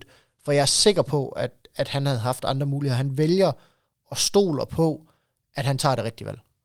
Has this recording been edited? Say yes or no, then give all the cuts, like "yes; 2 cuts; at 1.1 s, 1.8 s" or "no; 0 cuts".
no; 0 cuts